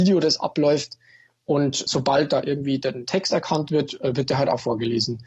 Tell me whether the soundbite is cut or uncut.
uncut